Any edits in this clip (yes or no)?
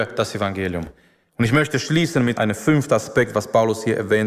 yes